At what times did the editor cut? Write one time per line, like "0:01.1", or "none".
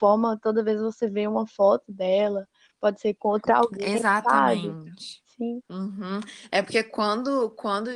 none